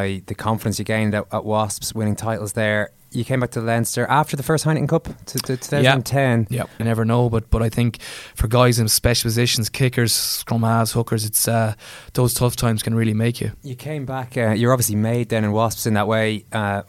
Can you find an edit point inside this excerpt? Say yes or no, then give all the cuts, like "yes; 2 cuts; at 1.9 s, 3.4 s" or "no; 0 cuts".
yes; 1 cut; at 6.8 s